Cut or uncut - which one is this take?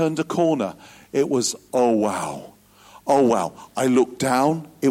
uncut